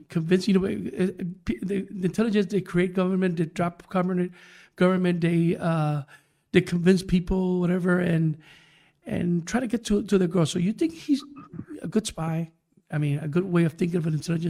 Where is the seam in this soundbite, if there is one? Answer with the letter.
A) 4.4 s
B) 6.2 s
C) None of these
C